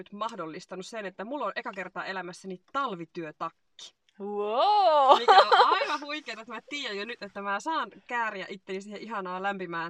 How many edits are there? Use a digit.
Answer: 0